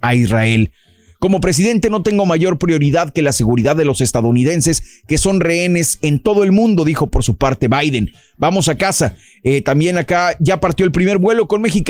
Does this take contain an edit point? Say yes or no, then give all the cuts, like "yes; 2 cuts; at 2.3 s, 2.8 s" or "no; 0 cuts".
no; 0 cuts